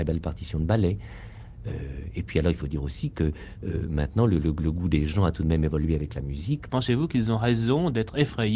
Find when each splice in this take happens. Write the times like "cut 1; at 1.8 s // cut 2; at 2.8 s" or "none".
cut 1; at 6.7 s